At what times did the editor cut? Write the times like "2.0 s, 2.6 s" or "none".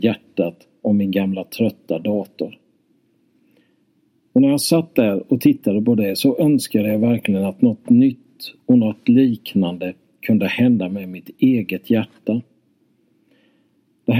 none